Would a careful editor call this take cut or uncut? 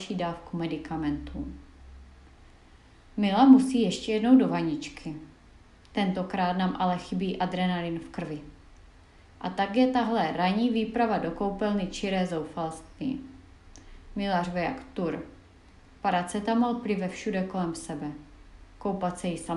uncut